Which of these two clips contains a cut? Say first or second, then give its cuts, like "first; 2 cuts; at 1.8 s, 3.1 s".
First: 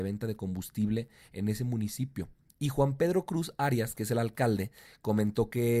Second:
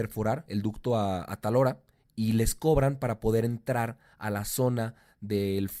first; 1 cut; at 2.5 s